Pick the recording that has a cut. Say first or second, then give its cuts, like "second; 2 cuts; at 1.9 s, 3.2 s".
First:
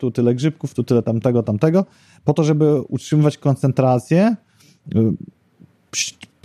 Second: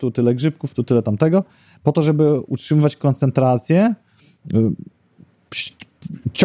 second; 1 cut; at 1.0 s